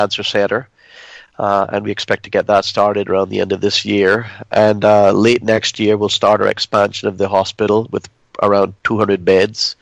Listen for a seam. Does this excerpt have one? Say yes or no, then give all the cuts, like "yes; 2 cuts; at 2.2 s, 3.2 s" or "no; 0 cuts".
no; 0 cuts